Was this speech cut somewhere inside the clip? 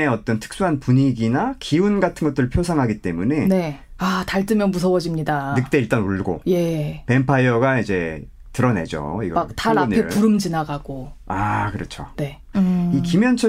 yes; 2 cuts; at 4.0 s, 12.5 s

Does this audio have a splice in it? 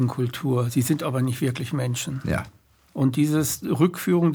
no; 0 cuts

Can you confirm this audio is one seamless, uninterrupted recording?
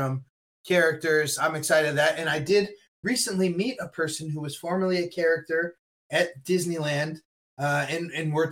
no; 1 cut; at 1.4 s

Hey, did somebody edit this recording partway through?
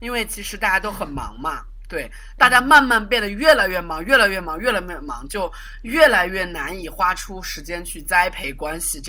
no; 0 cuts

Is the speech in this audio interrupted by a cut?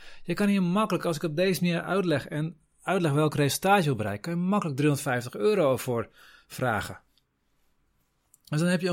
no; 0 cuts

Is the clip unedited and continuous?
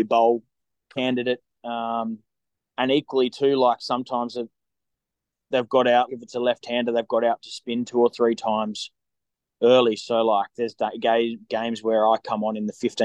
no; 1 cut; at 6.1 s

